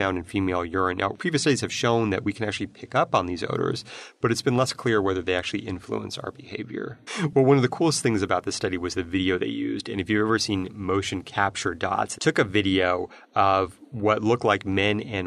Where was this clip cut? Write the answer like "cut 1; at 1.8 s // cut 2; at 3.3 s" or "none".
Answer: cut 1; at 7.1 s // cut 2; at 12.2 s